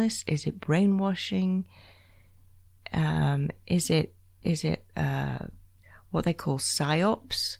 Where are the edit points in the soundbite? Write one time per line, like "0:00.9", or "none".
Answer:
none